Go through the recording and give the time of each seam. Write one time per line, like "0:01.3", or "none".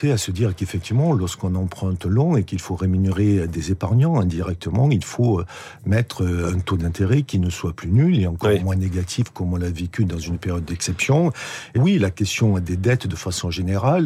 0:11.8